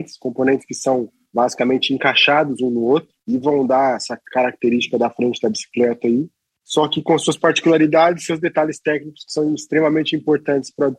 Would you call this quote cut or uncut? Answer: uncut